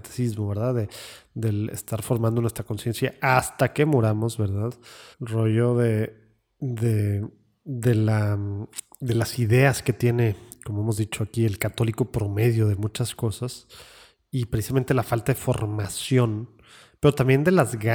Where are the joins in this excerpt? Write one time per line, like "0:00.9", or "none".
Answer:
0:05.1

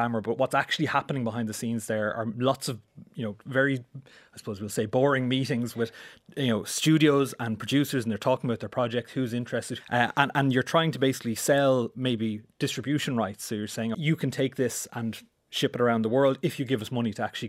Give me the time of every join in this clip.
0:09.8
0:13.9

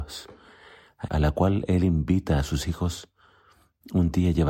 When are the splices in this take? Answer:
0:01.1

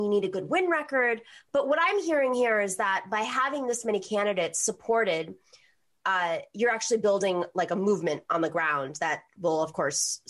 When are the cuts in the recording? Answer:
none

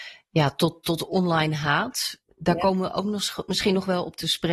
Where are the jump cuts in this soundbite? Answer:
0:02.2

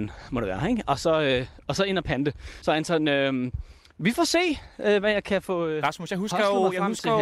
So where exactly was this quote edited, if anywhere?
0:02.6

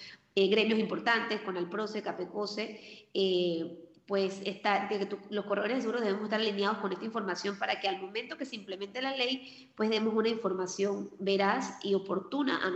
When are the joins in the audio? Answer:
none

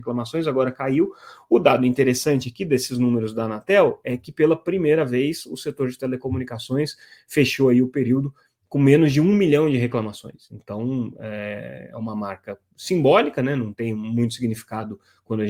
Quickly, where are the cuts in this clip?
none

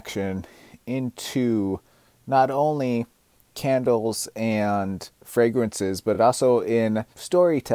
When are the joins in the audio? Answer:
none

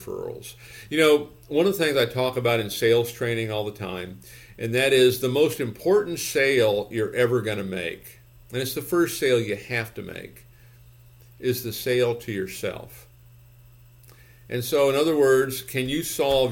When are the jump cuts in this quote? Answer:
none

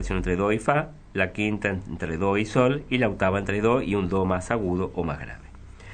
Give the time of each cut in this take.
none

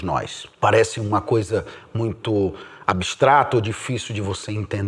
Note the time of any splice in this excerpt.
none

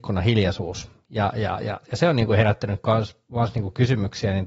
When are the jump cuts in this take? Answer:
none

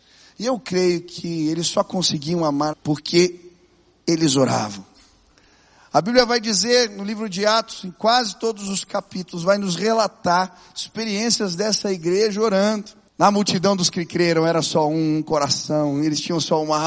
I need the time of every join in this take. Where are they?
0:02.7
0:13.1

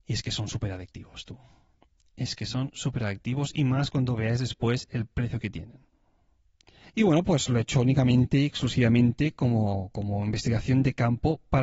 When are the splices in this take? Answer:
0:06.8

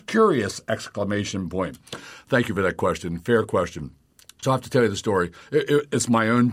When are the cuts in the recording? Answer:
none

